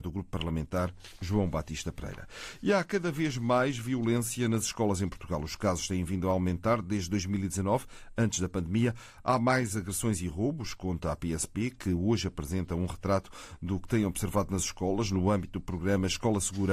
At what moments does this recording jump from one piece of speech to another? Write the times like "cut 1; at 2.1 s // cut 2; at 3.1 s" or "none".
none